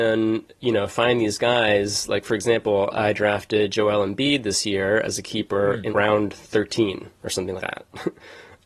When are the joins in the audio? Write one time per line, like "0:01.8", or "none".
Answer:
0:05.9
0:07.6